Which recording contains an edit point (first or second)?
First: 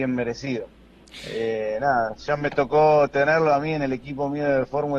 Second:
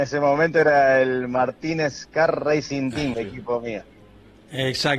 second